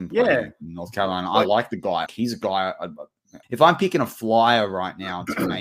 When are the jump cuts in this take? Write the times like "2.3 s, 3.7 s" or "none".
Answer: 2.1 s, 3.4 s